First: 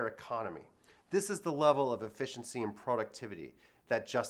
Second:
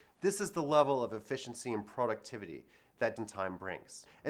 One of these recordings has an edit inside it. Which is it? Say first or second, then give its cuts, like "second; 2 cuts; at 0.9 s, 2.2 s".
second; 1 cut; at 3.2 s